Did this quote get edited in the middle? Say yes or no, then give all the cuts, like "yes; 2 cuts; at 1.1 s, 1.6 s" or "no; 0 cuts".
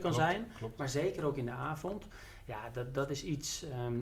no; 0 cuts